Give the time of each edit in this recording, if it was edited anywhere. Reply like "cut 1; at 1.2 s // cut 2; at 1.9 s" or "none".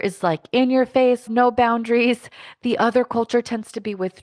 cut 1; at 1.3 s